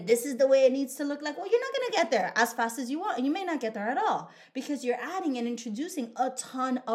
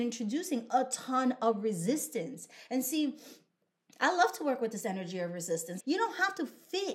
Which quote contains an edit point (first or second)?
second